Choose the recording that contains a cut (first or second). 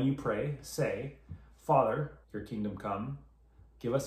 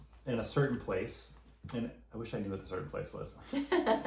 first